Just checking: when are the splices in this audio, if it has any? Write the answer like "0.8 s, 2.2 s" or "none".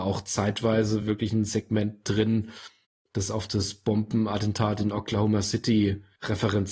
none